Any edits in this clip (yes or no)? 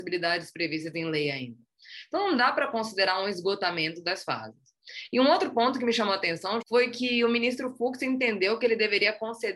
yes